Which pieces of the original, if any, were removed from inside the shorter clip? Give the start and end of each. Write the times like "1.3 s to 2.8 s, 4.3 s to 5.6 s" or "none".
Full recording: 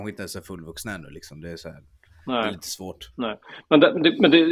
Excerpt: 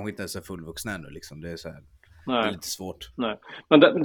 none